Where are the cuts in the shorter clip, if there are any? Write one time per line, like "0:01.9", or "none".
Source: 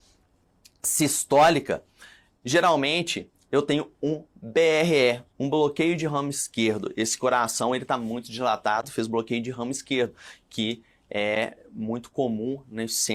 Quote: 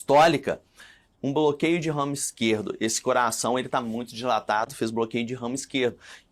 0:01.1